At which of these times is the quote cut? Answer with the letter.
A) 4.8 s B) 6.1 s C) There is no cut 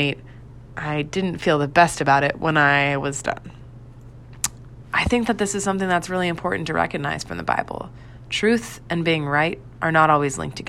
A